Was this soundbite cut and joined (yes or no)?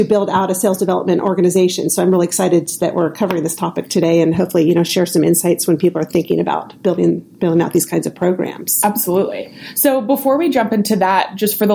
no